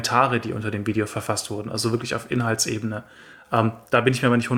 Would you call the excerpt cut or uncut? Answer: uncut